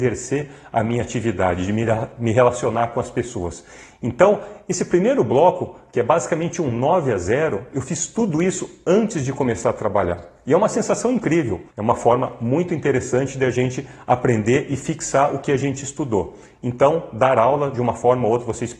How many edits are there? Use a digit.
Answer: 1